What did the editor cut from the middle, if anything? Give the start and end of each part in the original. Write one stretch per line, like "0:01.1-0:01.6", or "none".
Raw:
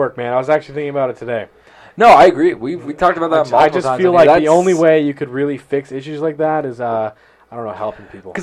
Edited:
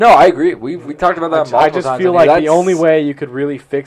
none